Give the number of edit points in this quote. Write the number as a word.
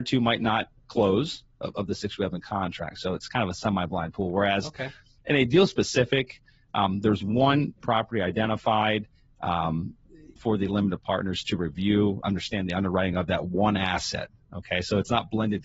two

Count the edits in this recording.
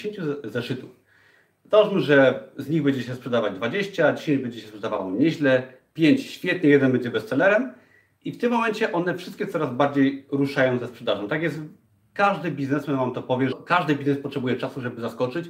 one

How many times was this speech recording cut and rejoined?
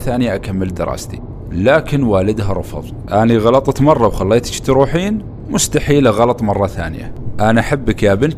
one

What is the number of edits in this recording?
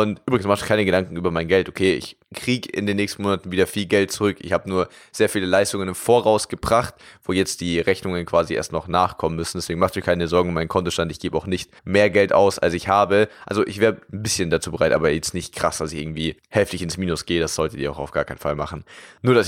two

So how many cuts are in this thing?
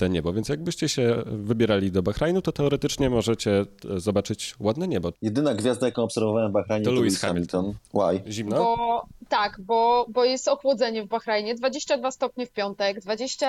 two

